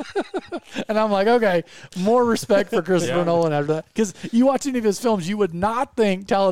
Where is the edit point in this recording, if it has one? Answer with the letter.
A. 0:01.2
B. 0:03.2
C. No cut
C